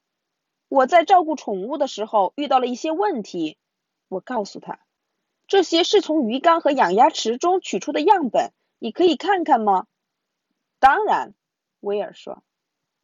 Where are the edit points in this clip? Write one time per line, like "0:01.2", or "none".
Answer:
none